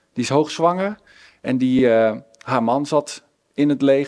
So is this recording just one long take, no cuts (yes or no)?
yes